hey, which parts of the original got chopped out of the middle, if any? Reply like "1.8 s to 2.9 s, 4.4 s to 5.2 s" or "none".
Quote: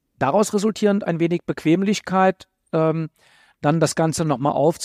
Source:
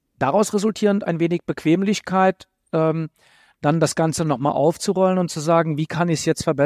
none

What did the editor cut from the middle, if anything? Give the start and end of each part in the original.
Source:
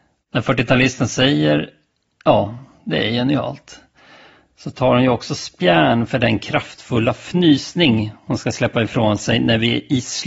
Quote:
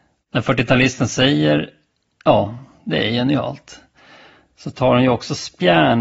none

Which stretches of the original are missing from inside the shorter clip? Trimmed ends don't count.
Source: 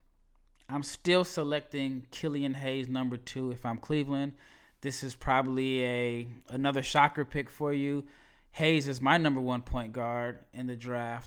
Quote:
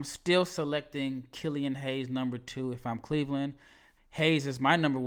4.7 s to 8.4 s

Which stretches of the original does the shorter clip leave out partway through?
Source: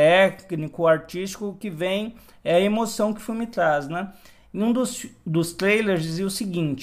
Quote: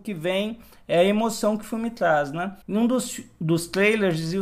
4.2 s to 4.5 s

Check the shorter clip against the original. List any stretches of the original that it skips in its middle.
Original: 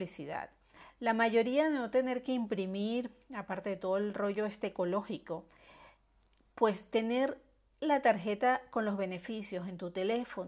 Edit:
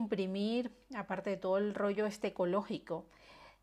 none

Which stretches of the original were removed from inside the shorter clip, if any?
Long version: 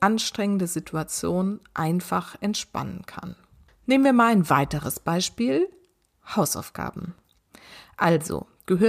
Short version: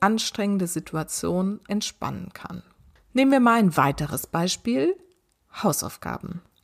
1.7 s to 2.4 s

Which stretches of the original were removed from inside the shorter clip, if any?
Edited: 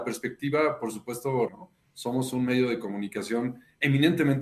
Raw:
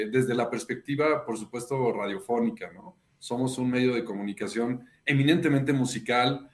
1.9 s to 2.7 s

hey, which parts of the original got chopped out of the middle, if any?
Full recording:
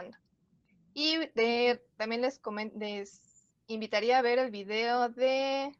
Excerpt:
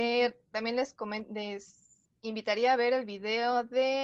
none

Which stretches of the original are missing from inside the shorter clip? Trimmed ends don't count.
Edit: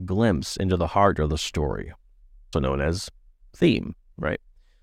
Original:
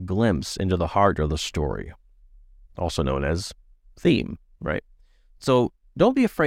2.5 s to 3.0 s

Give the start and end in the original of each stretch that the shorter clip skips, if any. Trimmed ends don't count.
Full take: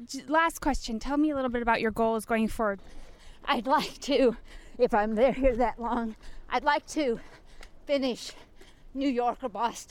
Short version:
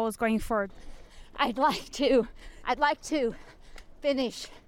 4.7 s to 6.5 s

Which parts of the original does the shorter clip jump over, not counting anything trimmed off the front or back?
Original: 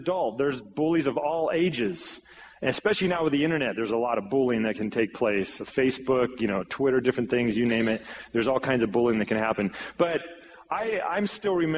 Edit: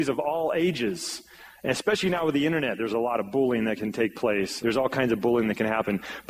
5.6 s to 8.3 s

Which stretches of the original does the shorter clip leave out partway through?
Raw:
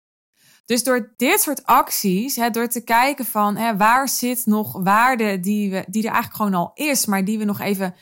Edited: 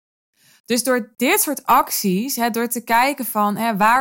none

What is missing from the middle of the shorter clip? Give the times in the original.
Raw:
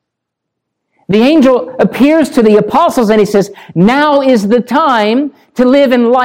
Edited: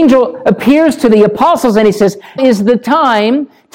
3.7 s to 4.2 s

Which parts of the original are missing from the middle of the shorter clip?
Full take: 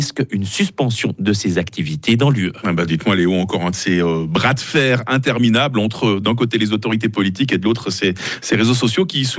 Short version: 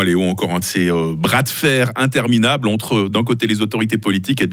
none

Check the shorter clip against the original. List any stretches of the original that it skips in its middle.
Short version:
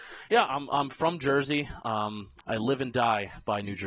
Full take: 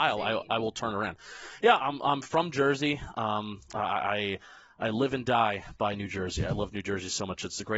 3.7 s to 4.7 s

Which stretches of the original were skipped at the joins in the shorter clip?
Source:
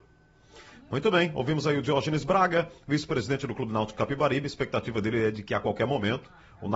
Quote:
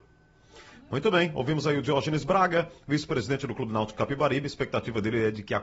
none

